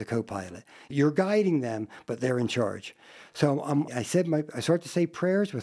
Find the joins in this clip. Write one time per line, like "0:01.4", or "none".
0:03.9